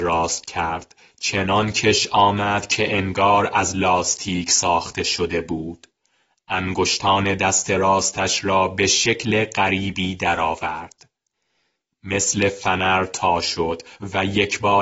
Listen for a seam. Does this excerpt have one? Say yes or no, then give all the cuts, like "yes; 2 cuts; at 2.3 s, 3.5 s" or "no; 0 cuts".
no; 0 cuts